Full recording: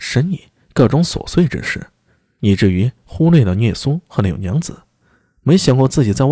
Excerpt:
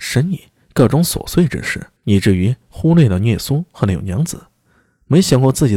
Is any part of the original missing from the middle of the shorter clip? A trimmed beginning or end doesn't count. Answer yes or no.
yes